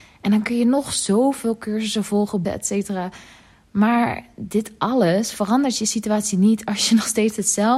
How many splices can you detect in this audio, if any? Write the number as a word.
one